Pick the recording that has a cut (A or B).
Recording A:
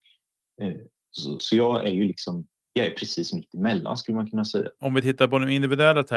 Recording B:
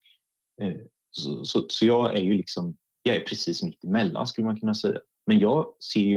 A